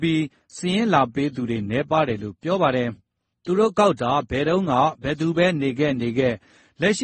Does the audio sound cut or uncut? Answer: uncut